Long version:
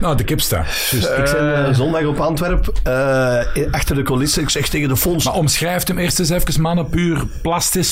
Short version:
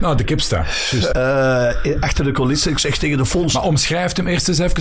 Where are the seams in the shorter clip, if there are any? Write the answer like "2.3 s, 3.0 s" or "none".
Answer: 1.1 s